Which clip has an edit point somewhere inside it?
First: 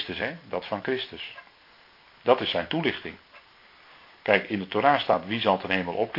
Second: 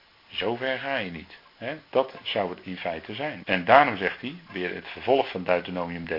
second; 2 cuts; at 1.5 s, 3.4 s

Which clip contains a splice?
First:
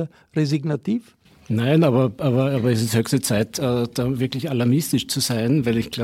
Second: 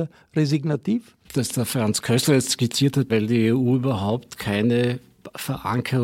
second; 2 cuts; at 1.3 s, 3.1 s

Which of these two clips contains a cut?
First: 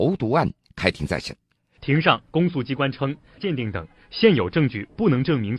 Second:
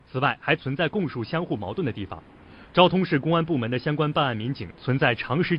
first; 2 cuts; at 1.8 s, 3.4 s

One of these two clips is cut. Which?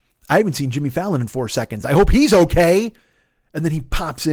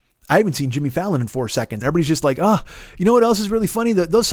second; 1 cut; at 1.8 s

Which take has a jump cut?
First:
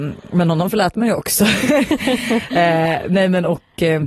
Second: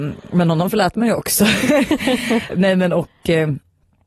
second; 1 cut; at 2.5 s

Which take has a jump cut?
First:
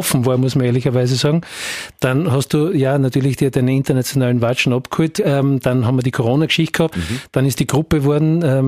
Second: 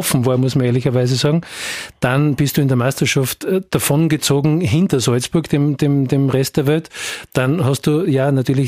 first; 3 cuts; at 1.9 s, 5.2 s, 6.9 s

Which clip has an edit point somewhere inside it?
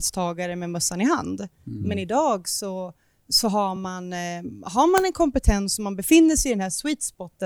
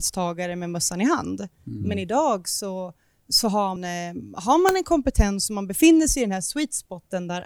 second; 1 cut; at 3.8 s

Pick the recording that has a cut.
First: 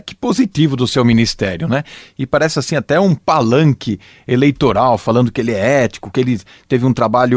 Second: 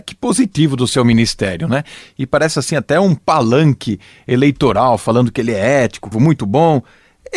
second; 1 cut; at 6.1 s

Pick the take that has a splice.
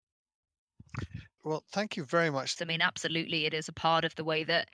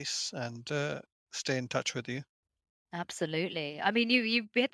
first; 2 cuts; at 1.4 s, 2.6 s

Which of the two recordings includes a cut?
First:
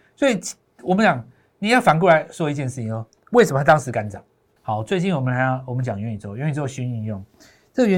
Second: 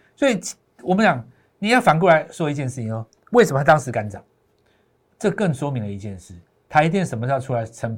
first; 1 cut; at 4.6 s

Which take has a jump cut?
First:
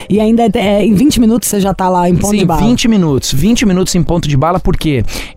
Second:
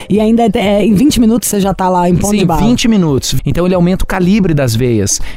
second; 1 cut; at 3.4 s

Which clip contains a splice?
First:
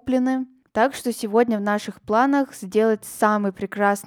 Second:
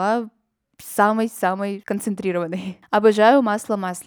second; 1 cut; at 1.8 s

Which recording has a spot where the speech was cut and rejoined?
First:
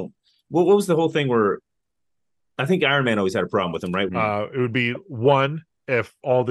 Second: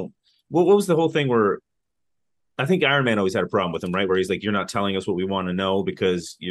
first; 1 cut; at 4.1 s

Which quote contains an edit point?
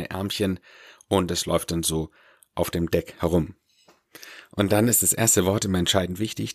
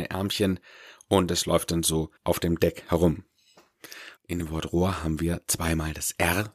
second; 2 cuts; at 2.2 s, 4.2 s

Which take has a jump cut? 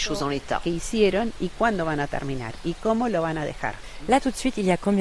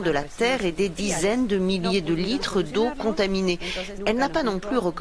second; 1 cut; at 4.0 s

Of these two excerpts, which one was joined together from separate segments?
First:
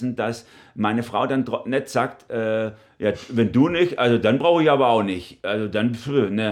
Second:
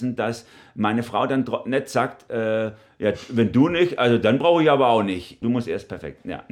second; 1 cut; at 5.4 s

